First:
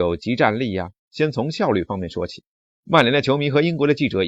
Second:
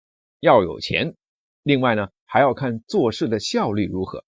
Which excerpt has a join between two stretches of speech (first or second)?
first